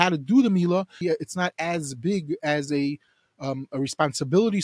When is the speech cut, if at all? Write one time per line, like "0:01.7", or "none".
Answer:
0:01.0